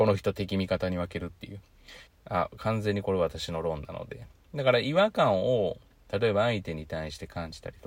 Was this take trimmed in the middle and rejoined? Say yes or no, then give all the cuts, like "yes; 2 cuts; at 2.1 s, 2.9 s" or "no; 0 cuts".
yes; 1 cut; at 2.1 s